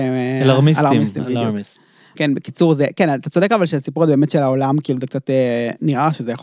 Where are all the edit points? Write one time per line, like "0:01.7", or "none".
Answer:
0:02.1

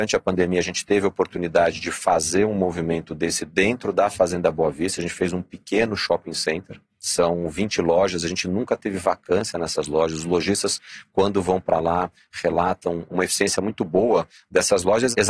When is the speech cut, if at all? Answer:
none

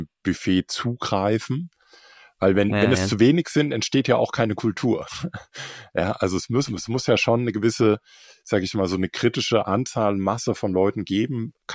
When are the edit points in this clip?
none

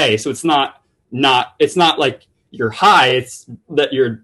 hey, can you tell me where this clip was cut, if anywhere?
none

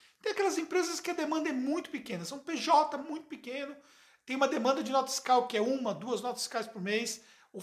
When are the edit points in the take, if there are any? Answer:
none

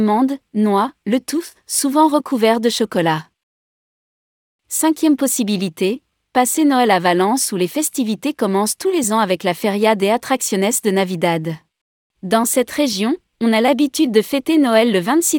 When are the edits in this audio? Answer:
0:12.0

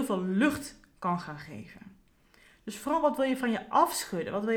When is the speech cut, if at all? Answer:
none

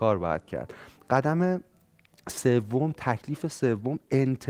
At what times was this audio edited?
none

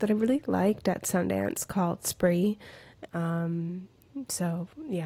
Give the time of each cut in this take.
0:03.1

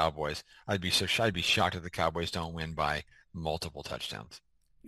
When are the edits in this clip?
none

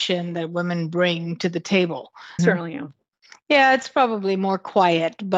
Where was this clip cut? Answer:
0:02.4

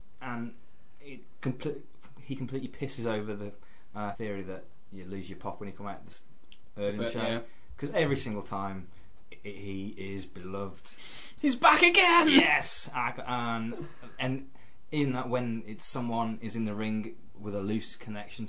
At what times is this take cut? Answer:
0:04.1
0:11.4
0:14.2

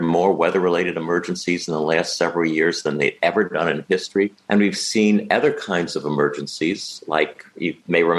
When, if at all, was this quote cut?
0:04.4

